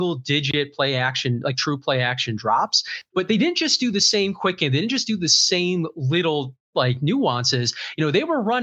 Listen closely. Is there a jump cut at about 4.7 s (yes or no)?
no